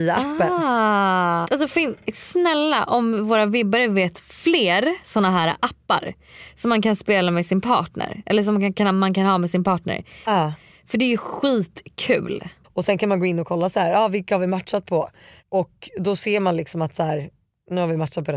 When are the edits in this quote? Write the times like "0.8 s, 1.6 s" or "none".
1.4 s, 10.2 s, 12.6 s